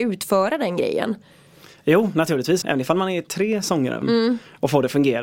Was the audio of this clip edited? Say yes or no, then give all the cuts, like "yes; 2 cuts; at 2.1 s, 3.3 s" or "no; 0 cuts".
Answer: yes; 2 cuts; at 2.6 s, 4.0 s